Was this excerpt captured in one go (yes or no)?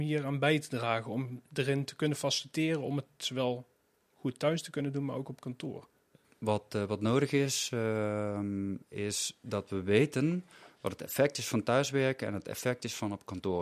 yes